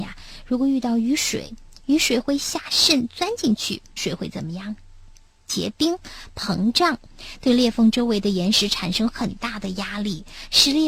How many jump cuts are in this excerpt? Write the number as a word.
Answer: one